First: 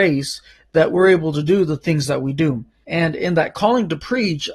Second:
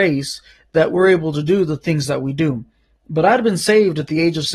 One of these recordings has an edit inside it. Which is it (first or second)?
first